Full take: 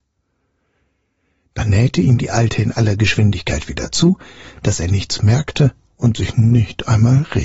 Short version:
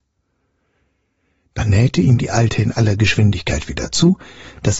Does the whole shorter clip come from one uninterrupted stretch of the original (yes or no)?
yes